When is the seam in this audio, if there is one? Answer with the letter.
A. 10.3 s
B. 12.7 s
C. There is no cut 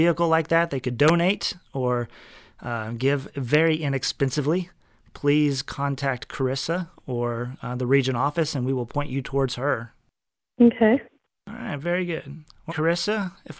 B